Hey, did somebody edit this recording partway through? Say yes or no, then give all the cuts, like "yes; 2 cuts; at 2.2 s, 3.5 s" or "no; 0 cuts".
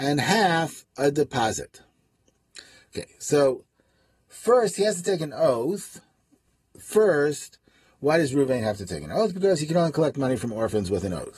yes; 1 cut; at 6.7 s